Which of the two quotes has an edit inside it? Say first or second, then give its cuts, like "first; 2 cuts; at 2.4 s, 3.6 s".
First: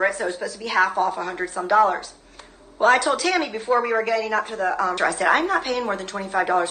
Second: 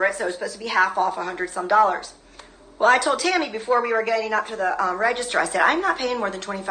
first; 1 cut; at 5.0 s